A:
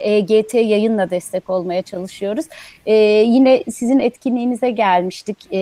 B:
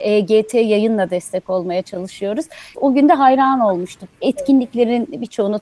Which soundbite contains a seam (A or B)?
B